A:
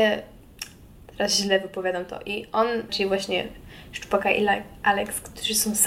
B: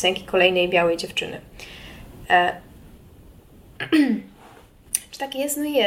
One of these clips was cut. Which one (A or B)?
A